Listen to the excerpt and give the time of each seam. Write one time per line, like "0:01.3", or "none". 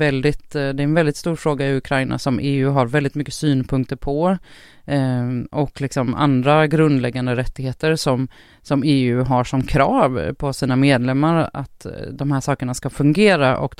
none